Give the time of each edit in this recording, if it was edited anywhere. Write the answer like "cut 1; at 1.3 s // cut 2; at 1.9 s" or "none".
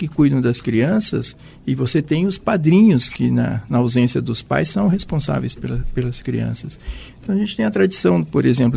cut 1; at 7.1 s